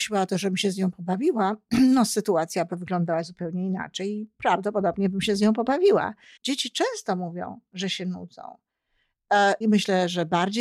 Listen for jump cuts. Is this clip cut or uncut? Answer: cut